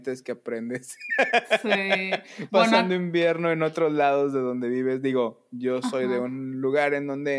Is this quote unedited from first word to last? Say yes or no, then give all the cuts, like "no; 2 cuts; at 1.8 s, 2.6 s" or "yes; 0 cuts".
yes; 0 cuts